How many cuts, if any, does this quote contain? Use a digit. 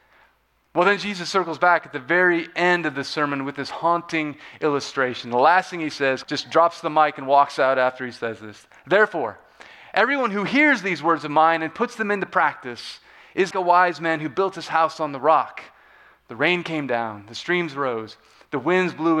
2